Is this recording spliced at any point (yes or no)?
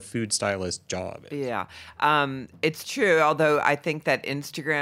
no